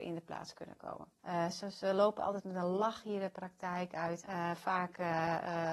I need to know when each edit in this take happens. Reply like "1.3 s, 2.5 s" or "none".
1.2 s, 4.2 s